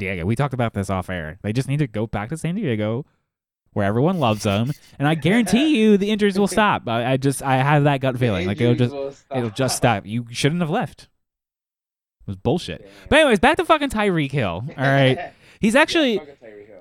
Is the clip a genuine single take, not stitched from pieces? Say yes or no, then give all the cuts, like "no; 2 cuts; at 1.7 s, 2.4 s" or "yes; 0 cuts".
yes; 0 cuts